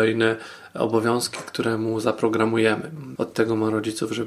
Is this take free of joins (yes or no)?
no